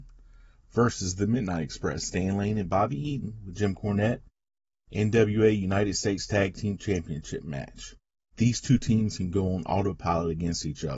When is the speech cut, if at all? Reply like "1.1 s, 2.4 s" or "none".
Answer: 8.3 s